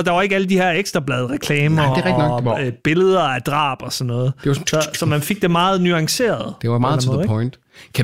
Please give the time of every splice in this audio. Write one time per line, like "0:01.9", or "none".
none